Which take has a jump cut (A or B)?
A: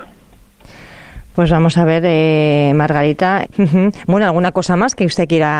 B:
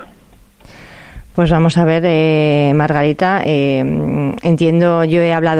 A